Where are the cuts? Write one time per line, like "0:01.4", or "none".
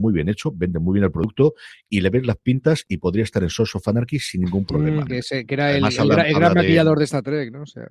0:05.1